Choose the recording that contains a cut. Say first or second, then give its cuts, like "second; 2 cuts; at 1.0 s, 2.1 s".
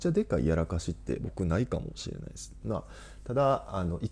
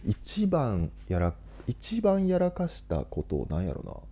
first; 1 cut; at 2.6 s